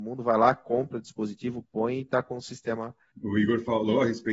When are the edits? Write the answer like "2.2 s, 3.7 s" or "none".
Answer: 3.1 s